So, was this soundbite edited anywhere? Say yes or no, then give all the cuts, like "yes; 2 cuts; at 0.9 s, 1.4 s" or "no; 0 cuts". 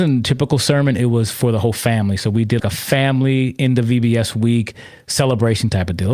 yes; 1 cut; at 2.6 s